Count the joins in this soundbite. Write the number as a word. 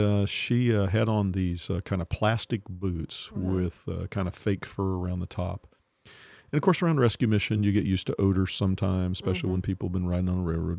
zero